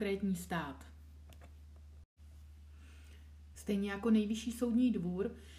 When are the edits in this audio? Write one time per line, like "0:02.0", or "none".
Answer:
0:03.5